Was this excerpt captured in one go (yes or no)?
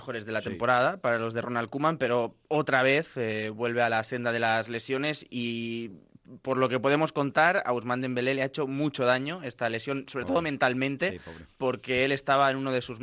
yes